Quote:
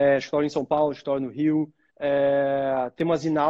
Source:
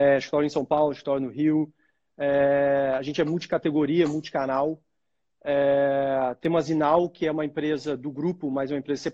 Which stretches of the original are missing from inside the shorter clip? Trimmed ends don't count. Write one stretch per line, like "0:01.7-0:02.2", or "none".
0:01.9-0:05.4